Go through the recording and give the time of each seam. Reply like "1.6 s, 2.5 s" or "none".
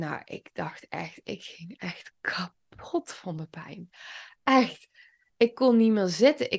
none